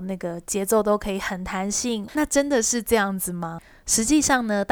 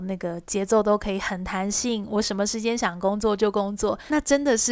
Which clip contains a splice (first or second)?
first